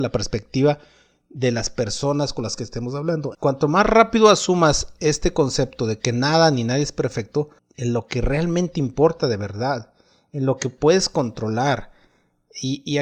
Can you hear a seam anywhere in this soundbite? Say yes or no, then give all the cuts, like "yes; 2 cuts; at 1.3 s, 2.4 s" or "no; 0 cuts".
yes; 2 cuts; at 3.3 s, 7.6 s